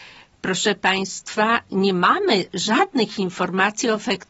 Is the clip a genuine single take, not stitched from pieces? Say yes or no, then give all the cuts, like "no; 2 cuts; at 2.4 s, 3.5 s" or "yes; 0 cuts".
yes; 0 cuts